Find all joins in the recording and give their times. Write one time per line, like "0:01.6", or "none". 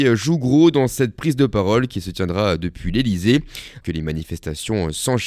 0:03.8